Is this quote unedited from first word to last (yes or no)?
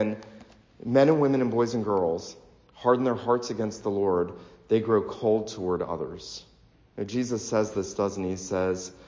yes